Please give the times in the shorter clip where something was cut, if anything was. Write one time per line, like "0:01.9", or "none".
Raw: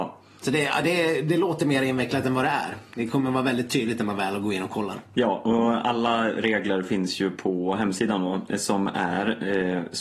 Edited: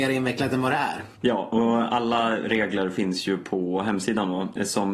0:01.1